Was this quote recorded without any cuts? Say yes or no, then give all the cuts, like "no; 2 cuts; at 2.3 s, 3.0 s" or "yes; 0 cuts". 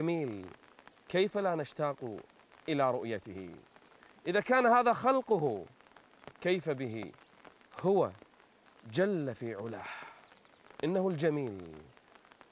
yes; 0 cuts